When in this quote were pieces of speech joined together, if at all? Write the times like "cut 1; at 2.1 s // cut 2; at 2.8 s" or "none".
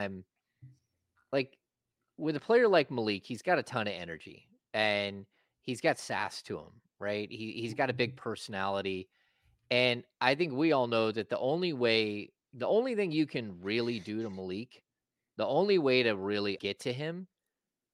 cut 1; at 16.6 s